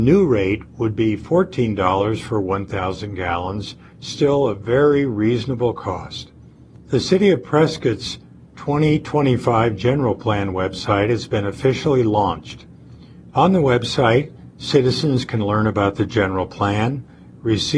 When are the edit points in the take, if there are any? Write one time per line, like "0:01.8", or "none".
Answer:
none